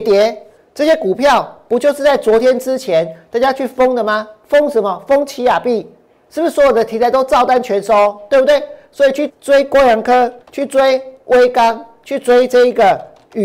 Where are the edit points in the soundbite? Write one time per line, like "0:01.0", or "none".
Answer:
0:09.3
0:10.4